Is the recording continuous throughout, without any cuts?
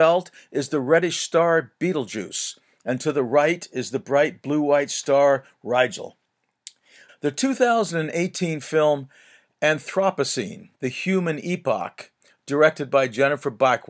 no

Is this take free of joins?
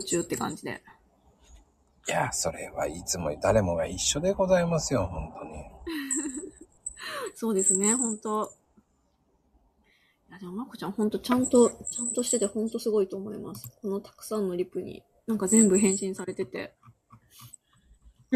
yes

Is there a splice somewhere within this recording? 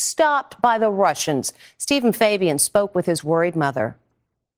no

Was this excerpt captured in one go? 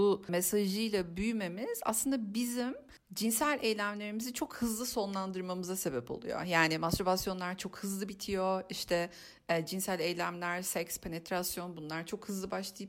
yes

